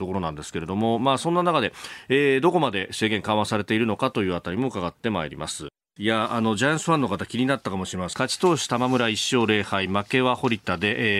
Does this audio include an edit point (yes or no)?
yes